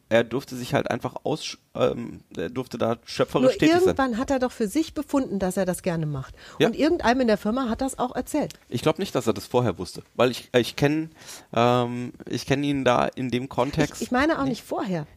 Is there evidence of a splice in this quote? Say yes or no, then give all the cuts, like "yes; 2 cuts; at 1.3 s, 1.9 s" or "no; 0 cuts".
no; 0 cuts